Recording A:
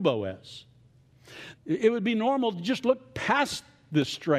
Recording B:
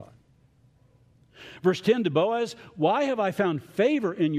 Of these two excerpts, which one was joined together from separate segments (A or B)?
A